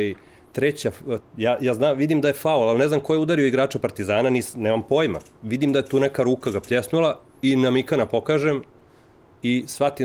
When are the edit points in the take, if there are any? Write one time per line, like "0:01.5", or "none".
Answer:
0:01.2